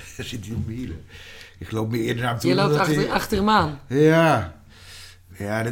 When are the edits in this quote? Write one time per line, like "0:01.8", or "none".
none